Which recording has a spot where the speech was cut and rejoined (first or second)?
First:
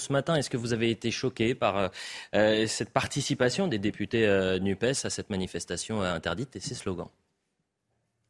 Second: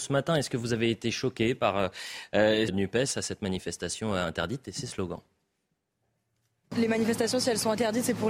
second